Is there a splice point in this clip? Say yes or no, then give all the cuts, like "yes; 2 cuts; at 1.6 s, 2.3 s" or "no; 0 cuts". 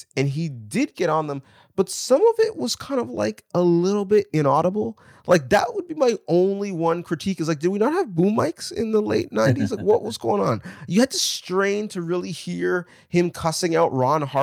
no; 0 cuts